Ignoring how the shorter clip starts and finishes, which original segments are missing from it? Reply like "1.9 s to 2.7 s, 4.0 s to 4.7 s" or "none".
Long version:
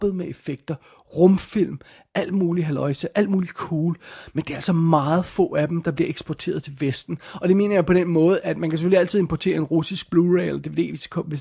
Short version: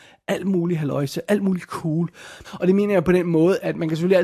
4.3 s to 7.3 s